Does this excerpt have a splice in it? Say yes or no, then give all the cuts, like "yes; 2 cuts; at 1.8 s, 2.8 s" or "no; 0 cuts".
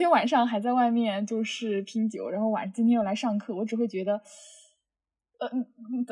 no; 0 cuts